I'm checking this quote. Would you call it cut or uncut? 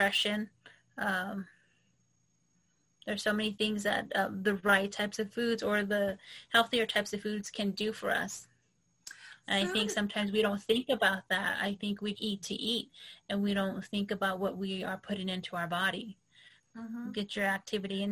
cut